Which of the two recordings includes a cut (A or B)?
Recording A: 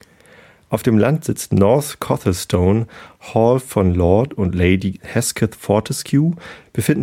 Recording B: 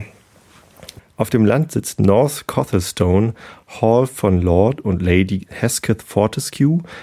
B